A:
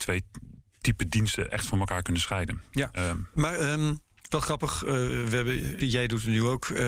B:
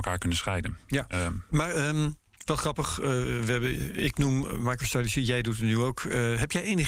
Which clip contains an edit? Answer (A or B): A